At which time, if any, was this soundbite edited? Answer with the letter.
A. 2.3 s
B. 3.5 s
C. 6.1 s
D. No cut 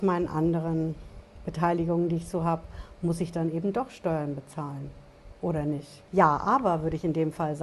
D